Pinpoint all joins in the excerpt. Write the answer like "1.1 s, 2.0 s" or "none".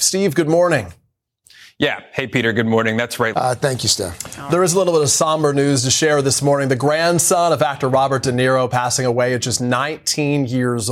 3.3 s